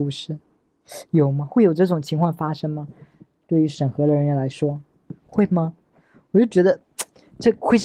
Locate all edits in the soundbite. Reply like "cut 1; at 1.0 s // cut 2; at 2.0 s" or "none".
none